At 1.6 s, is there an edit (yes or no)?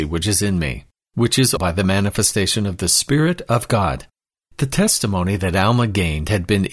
yes